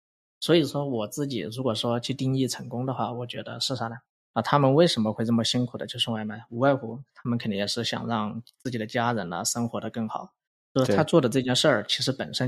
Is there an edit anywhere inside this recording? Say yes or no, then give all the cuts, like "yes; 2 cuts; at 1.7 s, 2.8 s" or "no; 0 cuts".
yes; 1 cut; at 4.3 s